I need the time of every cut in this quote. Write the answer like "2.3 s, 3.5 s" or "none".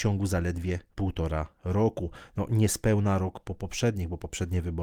0.9 s